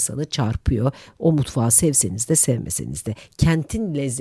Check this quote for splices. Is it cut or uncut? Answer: uncut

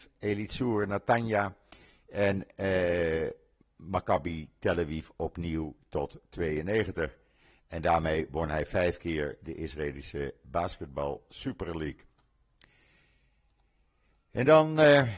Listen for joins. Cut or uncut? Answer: uncut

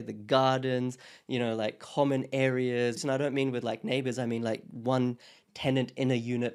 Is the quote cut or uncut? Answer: cut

